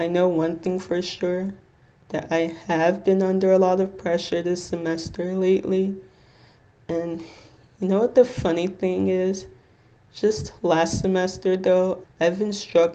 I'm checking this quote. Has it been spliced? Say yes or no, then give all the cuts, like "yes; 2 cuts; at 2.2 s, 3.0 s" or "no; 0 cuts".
yes; 1 cut; at 12.0 s